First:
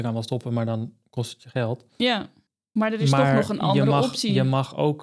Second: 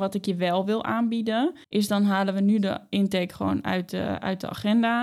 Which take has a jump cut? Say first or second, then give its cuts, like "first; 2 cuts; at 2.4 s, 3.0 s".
second; 1 cut; at 1.6 s